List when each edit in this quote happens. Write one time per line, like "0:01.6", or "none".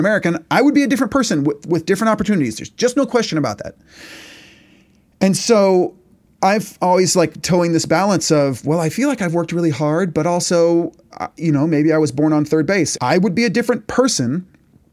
0:13.0